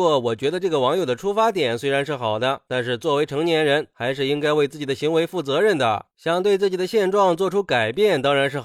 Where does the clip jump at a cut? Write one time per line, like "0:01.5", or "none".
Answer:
none